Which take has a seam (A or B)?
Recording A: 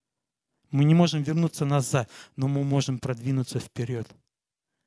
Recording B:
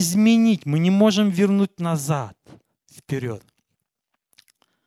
B